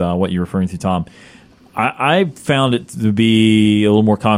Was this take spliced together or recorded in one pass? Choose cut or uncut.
uncut